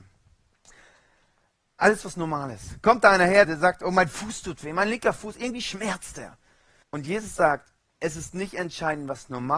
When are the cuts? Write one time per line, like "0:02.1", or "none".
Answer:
0:03.4
0:06.8